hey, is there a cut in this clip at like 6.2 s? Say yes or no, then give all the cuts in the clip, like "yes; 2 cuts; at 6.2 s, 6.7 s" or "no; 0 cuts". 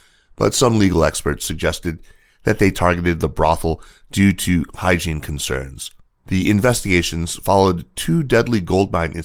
yes; 1 cut; at 6.2 s